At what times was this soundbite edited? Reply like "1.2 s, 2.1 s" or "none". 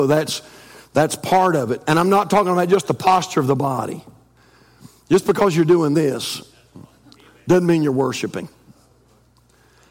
none

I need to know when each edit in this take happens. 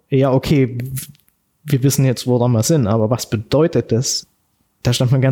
none

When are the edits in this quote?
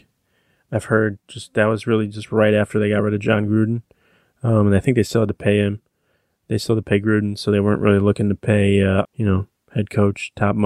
9.0 s

